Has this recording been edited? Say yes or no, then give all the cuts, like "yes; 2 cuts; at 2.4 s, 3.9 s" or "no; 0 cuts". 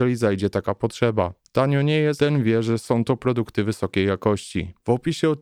yes; 1 cut; at 2.2 s